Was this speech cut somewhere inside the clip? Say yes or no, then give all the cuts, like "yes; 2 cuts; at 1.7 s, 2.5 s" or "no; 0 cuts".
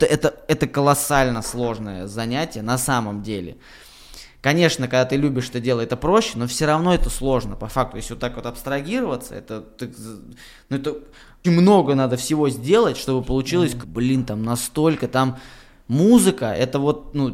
yes; 2 cuts; at 11.4 s, 13.8 s